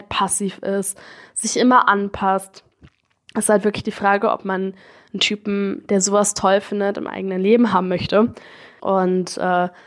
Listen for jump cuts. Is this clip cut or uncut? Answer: cut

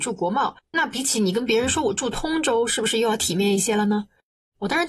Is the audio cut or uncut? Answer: uncut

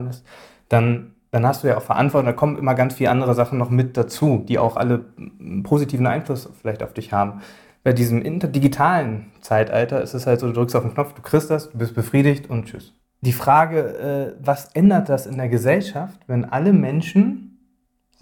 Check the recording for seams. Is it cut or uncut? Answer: uncut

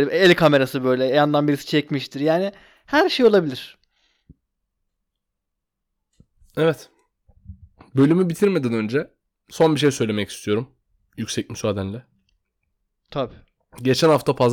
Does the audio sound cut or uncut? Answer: uncut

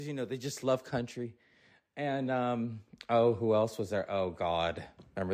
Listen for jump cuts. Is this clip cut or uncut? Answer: uncut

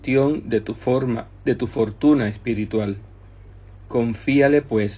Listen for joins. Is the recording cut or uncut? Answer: uncut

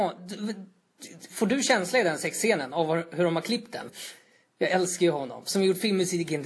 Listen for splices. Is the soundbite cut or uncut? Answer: cut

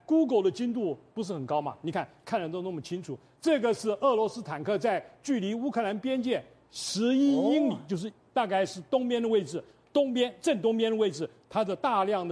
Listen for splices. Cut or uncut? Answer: uncut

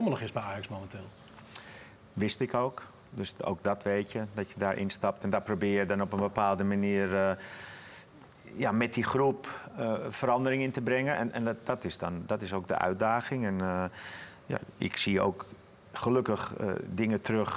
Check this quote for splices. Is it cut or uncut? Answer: uncut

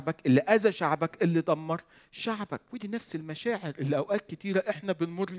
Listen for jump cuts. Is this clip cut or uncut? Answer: cut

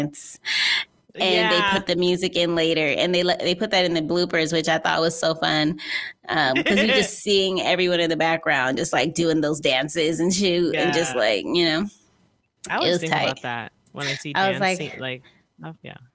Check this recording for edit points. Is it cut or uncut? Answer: uncut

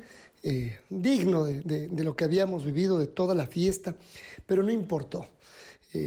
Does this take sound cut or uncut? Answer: uncut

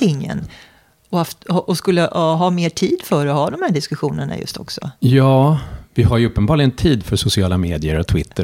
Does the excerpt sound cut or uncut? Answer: uncut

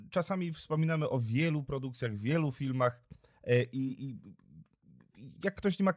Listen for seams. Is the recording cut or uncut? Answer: uncut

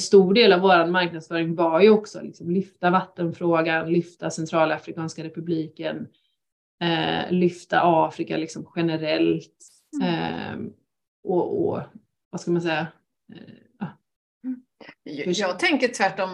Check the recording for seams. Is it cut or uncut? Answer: uncut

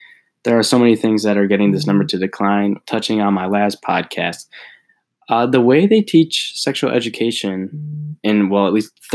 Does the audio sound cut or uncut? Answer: cut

